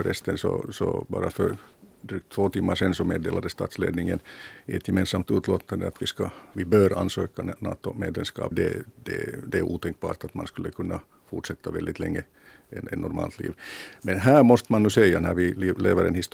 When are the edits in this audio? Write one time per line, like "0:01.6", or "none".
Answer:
0:08.5